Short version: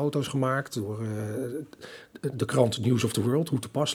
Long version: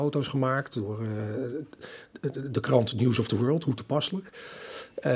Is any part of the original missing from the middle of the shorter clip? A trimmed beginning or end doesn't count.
yes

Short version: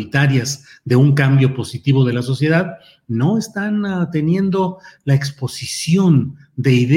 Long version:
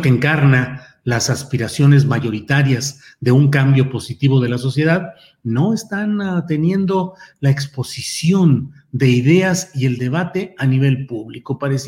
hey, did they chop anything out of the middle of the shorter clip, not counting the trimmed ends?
no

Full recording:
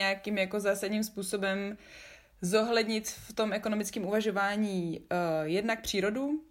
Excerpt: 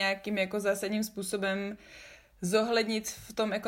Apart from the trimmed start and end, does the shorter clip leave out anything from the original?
no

